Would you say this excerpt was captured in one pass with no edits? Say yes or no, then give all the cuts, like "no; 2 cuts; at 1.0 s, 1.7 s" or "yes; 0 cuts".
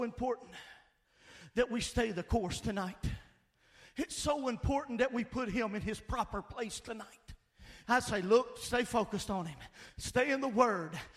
no; 1 cut; at 7.8 s